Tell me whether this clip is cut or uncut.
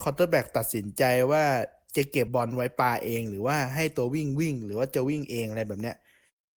cut